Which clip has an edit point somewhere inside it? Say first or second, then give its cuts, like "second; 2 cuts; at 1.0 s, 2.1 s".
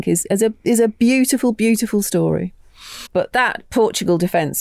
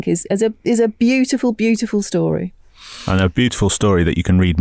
first; 1 cut; at 3.1 s